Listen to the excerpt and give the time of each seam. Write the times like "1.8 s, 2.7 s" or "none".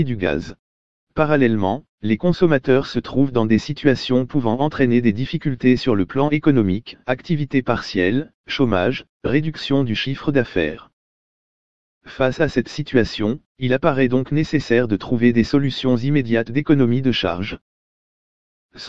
none